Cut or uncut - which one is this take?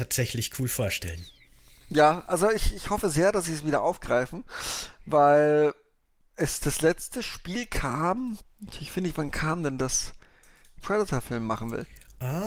cut